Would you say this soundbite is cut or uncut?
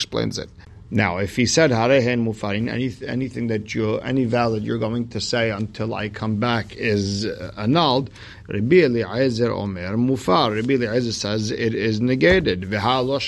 uncut